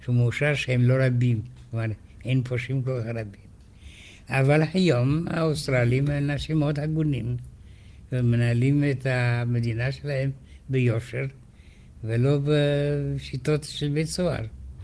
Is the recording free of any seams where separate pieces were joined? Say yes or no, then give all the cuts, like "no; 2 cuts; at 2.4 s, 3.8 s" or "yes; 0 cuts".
yes; 0 cuts